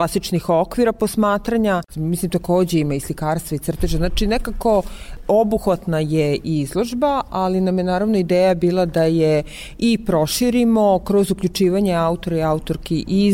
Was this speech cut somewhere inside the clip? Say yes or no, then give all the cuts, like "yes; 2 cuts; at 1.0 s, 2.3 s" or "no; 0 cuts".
yes; 1 cut; at 1.9 s